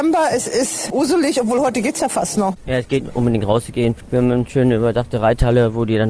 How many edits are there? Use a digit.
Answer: 1